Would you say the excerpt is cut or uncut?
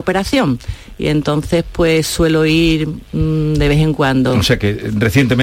uncut